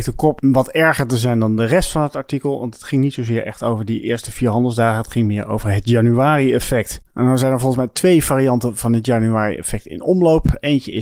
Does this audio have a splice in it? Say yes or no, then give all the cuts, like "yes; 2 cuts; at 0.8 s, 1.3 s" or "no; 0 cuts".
no; 0 cuts